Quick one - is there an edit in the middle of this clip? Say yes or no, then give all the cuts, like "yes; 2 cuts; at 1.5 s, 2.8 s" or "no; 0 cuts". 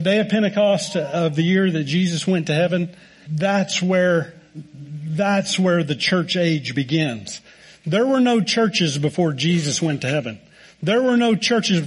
yes; 1 cut; at 3.3 s